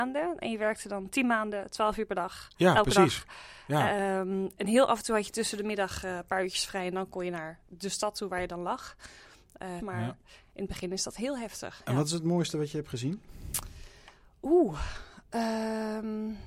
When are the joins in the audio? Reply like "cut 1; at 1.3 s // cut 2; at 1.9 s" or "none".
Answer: cut 1; at 9.8 s